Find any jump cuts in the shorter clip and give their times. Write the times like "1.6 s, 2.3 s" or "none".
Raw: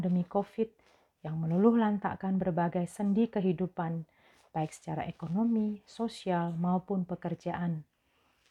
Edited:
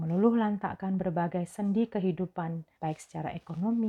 2.7 s